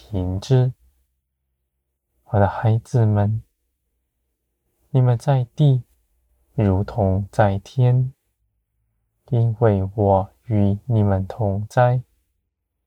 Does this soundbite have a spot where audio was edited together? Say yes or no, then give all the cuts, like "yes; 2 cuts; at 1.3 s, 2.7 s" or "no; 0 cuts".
no; 0 cuts